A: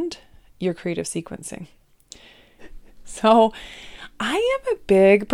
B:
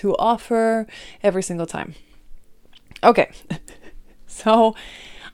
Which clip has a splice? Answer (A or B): A